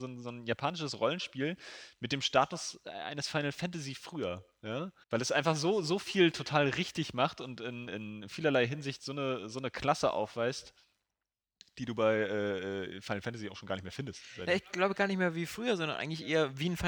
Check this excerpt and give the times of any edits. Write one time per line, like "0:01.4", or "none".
0:05.0
0:07.9